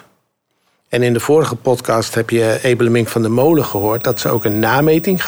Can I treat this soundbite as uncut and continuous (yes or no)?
yes